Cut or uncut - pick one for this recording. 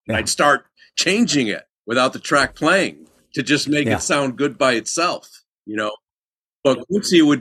uncut